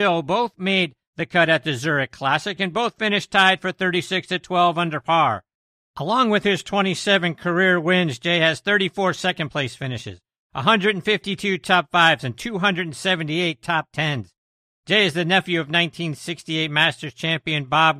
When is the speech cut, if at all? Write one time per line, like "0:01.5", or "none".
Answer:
none